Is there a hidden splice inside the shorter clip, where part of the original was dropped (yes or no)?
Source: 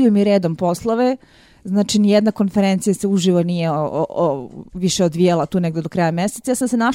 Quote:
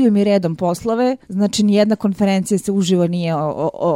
yes